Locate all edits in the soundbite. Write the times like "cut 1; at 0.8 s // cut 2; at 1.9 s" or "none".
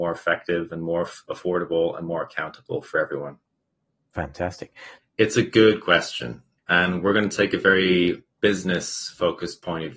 cut 1; at 5.0 s